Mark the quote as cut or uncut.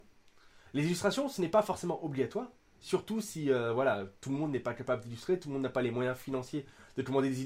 uncut